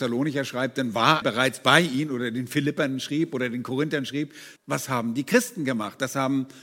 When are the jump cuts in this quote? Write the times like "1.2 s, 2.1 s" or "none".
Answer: 1.2 s, 4.6 s